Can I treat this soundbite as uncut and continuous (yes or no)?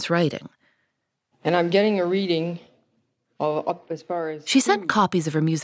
no